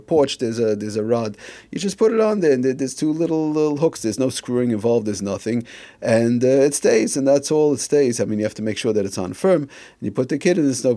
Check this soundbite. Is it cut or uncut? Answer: uncut